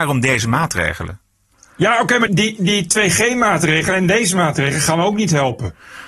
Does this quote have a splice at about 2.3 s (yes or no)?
yes